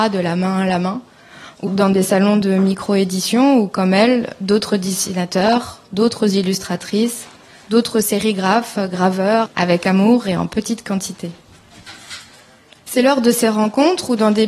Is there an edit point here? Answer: yes; 2 cuts; at 1.7 s, 9.5 s

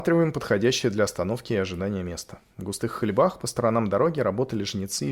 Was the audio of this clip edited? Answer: no; 0 cuts

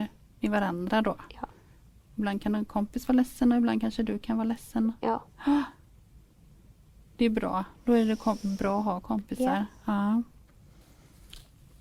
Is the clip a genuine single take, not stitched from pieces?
yes; 0 cuts

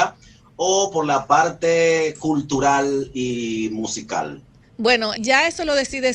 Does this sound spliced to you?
yes; 1 cut; at 5.2 s

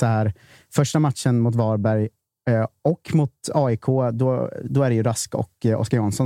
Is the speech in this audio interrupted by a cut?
no; 0 cuts

